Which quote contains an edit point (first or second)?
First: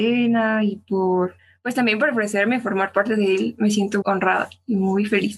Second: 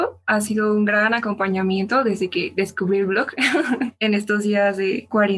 first